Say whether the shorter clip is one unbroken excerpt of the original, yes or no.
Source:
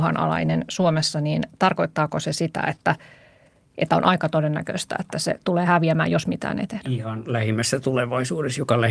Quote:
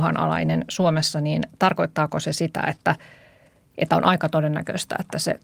yes